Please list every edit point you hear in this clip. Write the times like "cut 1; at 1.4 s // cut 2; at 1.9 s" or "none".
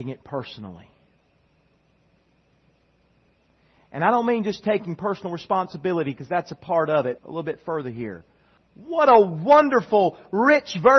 cut 1; at 7.2 s // cut 2; at 8.6 s